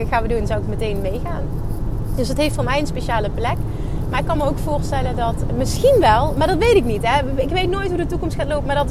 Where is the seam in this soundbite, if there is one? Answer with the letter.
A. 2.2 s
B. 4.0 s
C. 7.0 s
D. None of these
D